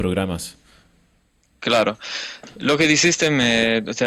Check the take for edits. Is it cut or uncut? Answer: uncut